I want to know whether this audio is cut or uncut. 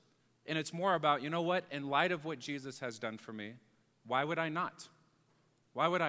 uncut